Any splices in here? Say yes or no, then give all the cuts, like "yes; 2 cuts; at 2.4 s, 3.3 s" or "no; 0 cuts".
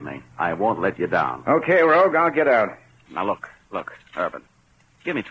yes; 1 cut; at 3.1 s